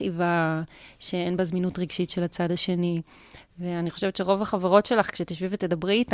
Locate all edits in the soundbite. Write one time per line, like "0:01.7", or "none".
none